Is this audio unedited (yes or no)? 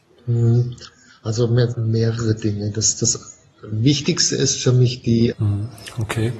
no